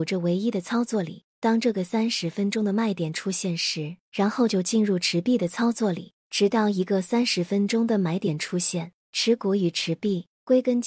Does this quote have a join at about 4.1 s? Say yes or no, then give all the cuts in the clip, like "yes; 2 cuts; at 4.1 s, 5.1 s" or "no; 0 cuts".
yes; 1 cut; at 4.1 s